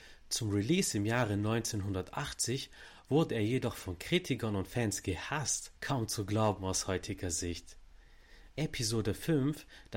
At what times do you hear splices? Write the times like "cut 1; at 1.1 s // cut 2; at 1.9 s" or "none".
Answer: cut 1; at 5.8 s // cut 2; at 8.5 s

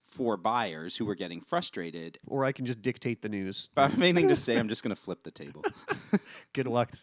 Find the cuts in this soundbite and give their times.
cut 1; at 2.2 s // cut 2; at 3.8 s

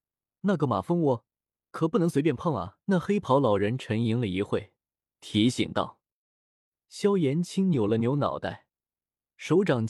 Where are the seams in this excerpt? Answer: cut 1; at 2.8 s

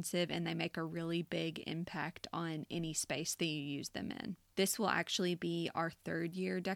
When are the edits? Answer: cut 1; at 4.5 s

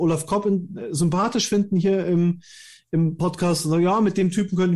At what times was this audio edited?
none

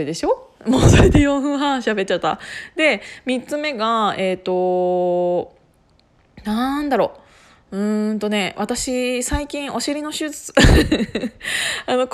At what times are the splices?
none

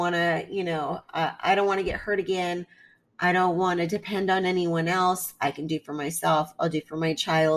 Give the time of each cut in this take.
none

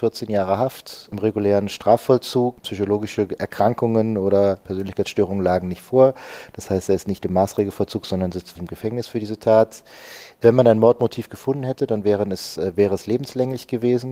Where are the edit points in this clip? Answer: cut 1; at 8.6 s

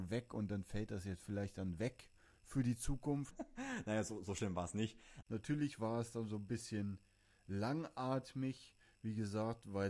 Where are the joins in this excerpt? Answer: cut 1; at 3.3 s // cut 2; at 5.2 s

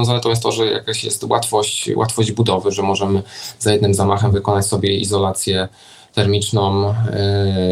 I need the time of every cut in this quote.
none

